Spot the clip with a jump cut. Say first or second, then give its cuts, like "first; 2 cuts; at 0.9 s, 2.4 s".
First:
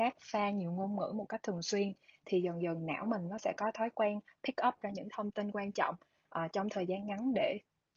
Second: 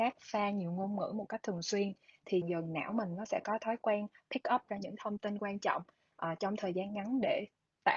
second; 1 cut; at 2.4 s